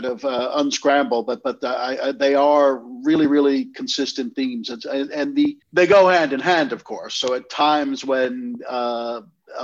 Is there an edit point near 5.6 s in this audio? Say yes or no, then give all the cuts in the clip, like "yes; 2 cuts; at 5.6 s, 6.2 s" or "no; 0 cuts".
yes; 1 cut; at 5.6 s